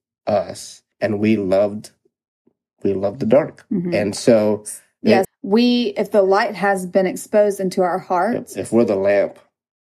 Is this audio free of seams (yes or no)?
no